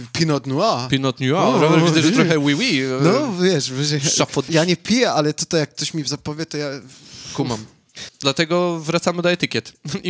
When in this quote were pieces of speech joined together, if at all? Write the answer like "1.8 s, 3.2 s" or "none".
4.5 s, 8.1 s